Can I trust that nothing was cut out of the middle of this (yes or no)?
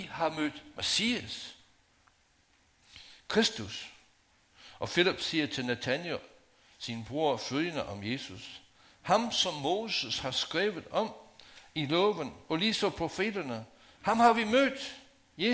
yes